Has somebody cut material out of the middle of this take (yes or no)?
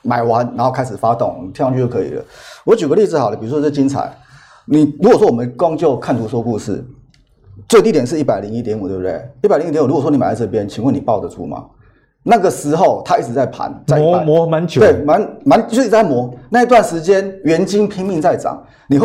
no